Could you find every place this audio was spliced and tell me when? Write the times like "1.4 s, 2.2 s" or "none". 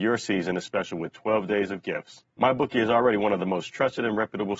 2.3 s